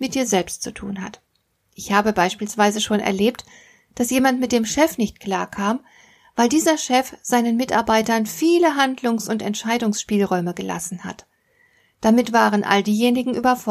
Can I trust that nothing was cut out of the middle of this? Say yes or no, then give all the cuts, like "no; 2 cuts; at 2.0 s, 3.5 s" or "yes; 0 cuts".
yes; 0 cuts